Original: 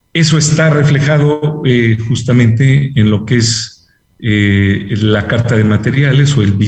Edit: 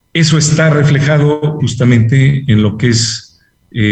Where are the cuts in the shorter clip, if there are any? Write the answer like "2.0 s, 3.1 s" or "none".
1.6 s